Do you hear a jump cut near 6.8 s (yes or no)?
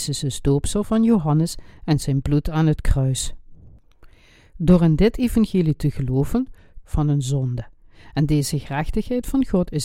yes